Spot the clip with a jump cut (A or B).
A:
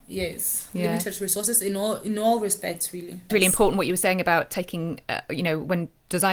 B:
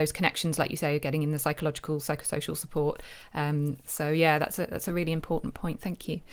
A